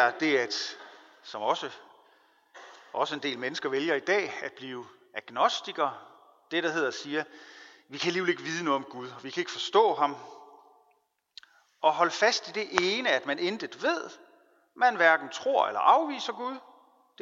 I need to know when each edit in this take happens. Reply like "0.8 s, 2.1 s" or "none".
none